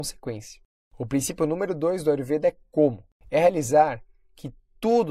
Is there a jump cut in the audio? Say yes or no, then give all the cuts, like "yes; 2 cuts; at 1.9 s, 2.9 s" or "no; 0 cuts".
yes; 1 cut; at 3.2 s